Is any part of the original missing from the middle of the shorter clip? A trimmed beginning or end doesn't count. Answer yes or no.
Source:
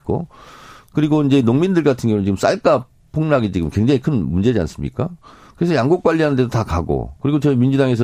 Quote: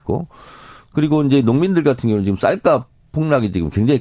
no